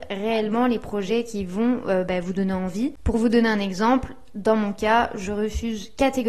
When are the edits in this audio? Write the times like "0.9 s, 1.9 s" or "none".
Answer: none